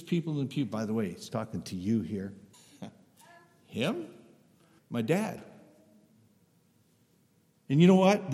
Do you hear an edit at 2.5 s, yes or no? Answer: yes